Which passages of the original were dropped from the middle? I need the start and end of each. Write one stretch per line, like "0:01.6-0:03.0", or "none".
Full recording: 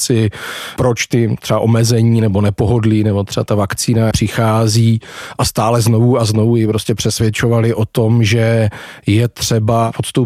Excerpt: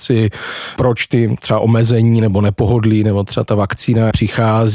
none